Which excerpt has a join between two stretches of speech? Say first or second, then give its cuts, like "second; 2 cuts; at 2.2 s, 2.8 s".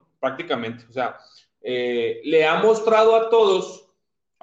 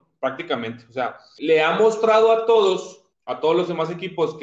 second; 2 cuts; at 1.4 s, 3.1 s